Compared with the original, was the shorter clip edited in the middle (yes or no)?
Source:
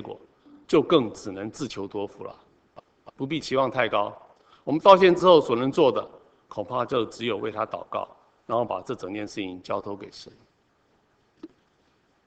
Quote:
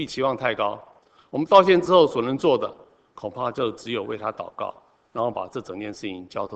no